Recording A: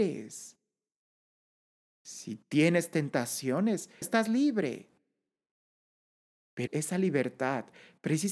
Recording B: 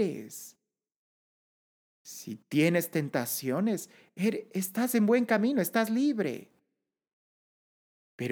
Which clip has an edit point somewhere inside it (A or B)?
A